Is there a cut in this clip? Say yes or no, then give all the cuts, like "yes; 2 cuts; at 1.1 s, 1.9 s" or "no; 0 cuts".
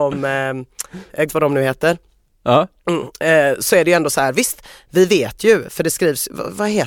yes; 1 cut; at 1.3 s